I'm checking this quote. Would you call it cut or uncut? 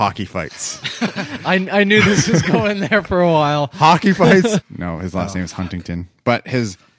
cut